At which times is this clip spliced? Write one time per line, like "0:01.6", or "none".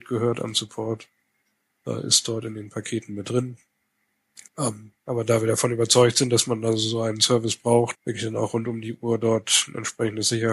0:04.5
0:08.0